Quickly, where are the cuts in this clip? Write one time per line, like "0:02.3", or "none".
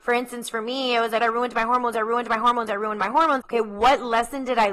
0:01.2
0:03.4